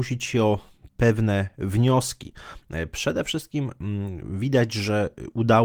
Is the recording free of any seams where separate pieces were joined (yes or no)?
yes